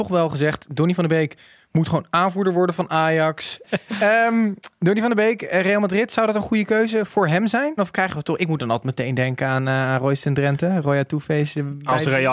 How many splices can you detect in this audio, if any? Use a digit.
2